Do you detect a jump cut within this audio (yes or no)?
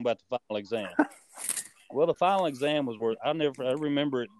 no